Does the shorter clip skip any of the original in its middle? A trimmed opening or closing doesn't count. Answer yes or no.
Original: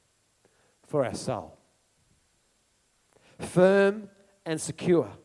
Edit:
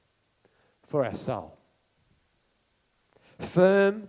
no